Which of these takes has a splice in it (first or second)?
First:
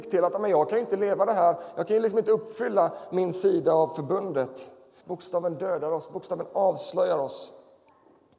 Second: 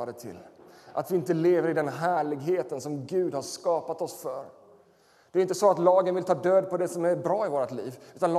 first